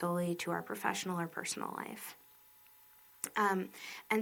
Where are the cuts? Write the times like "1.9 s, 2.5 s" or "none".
none